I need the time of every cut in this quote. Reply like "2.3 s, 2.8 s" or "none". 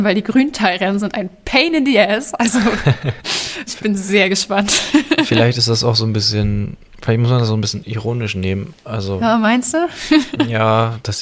3.7 s

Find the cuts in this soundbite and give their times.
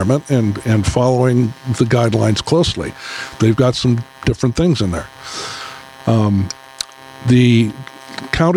3.4 s, 6.0 s

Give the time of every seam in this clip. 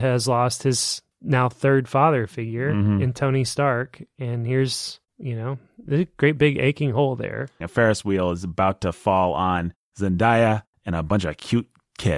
7.6 s

